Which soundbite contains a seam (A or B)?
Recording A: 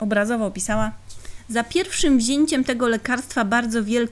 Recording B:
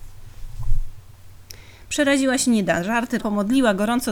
B